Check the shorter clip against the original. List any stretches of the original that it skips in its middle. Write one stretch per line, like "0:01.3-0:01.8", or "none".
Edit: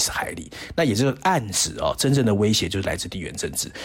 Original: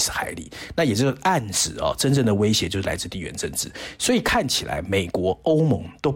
none